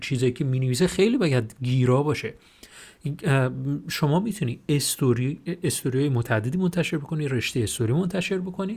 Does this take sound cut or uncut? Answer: uncut